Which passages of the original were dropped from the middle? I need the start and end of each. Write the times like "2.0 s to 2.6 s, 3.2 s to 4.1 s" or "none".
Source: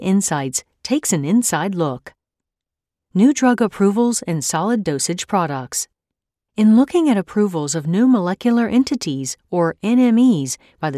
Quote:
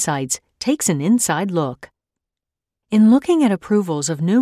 3.0 s to 6.4 s